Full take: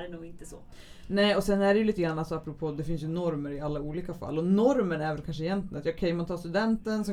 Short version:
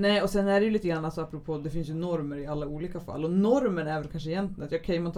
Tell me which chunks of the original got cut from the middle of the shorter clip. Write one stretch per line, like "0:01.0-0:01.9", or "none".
none